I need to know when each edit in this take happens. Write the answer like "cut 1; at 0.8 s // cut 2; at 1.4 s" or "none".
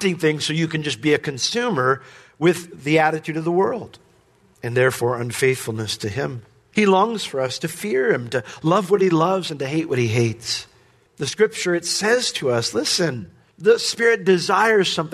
cut 1; at 6.7 s